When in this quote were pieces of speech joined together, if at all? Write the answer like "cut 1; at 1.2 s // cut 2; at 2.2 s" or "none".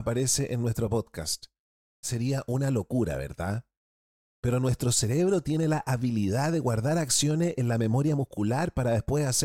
cut 1; at 2.0 s